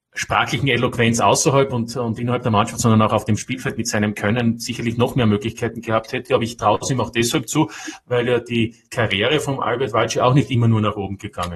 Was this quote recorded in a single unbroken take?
yes; 0 cuts

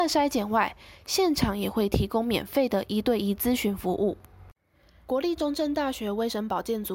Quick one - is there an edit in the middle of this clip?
yes; 1 cut; at 5.1 s

